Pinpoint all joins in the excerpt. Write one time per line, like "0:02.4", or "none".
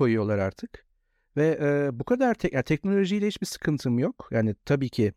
none